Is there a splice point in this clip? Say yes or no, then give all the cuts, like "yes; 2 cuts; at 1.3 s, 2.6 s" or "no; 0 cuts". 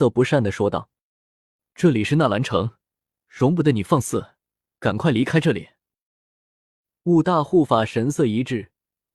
no; 0 cuts